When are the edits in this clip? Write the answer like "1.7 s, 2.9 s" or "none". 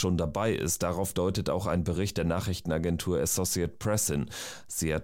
none

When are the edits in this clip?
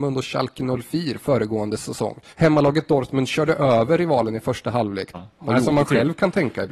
2.3 s, 5.1 s

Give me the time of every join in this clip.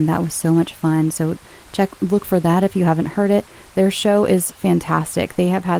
none

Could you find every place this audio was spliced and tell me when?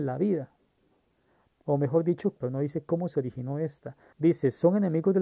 2.4 s, 4.1 s

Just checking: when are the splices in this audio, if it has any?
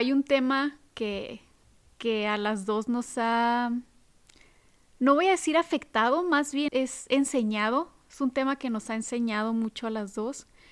6.7 s

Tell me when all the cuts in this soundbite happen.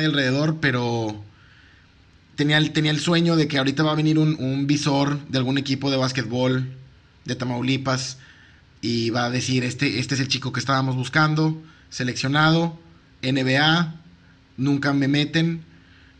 4.4 s

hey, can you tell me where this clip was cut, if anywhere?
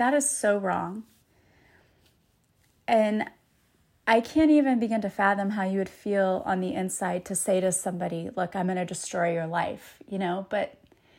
none

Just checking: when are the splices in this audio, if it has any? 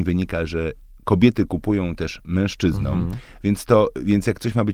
none

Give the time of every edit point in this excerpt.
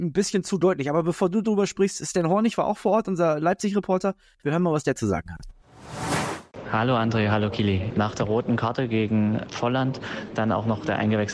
7.9 s

